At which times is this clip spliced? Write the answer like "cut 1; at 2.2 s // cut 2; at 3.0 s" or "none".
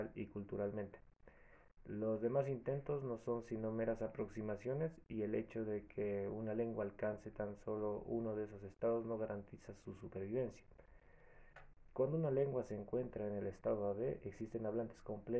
none